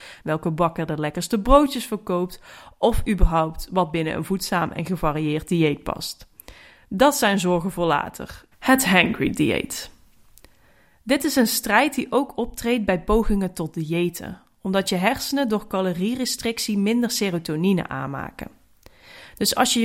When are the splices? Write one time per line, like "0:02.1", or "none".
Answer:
0:08.5